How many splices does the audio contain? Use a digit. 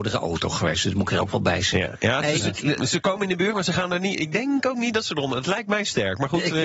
1